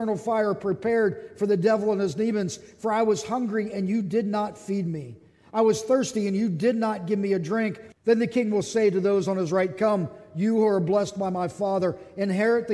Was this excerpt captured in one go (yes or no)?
no